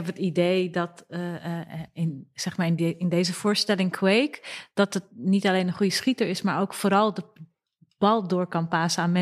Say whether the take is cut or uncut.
uncut